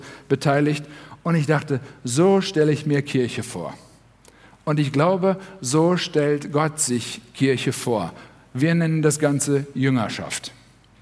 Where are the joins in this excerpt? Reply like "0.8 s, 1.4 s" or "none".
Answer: none